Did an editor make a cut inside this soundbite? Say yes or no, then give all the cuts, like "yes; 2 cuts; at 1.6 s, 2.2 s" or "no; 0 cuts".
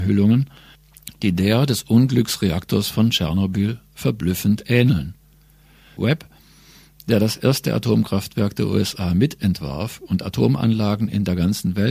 yes; 1 cut; at 6.0 s